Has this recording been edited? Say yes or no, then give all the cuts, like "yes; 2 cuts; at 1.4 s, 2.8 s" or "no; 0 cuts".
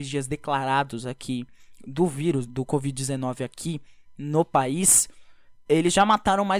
yes; 1 cut; at 2.5 s